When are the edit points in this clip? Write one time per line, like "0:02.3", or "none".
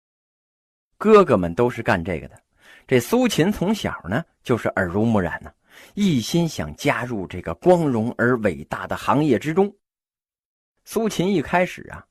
none

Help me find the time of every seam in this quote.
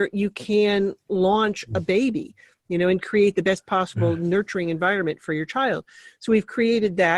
none

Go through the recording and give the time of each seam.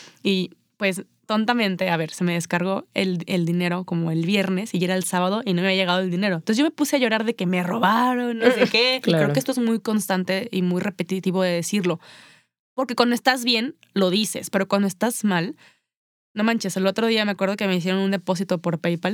0:09.0

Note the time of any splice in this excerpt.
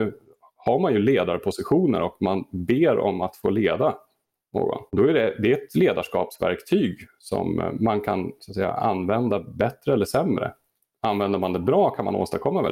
0:04.9

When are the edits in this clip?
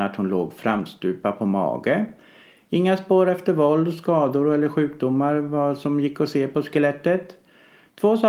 none

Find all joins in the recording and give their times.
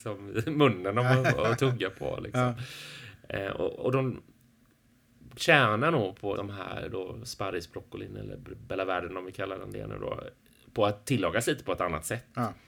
0:03.8
0:06.4

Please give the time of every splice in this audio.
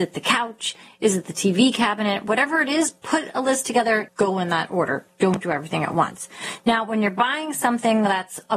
0:04.1

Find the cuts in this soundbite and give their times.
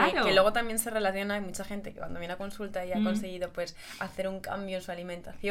none

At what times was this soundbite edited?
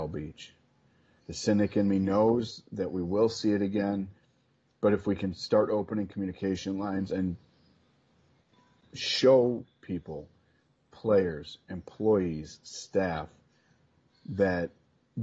0:01.2

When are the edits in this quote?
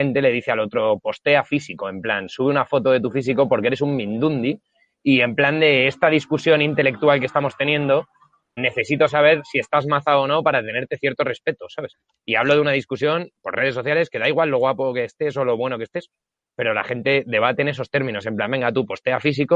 0:08.6

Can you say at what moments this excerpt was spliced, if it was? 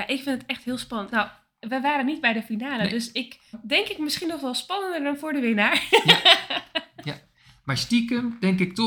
0:01.1
0:03.5

